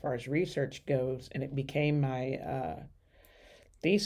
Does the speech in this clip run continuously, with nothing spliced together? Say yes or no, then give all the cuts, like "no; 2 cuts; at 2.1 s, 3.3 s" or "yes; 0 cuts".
yes; 0 cuts